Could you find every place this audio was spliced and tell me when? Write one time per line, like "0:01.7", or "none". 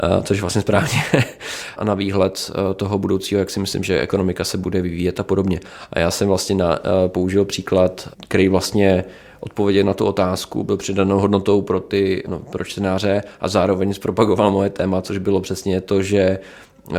0:01.8